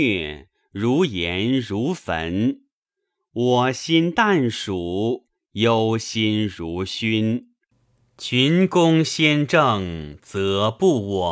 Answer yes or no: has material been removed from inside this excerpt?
no